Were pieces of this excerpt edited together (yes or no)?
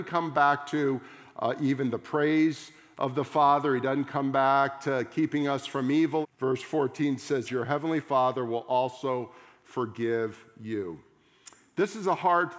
yes